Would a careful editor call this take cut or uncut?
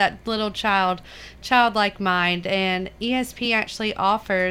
uncut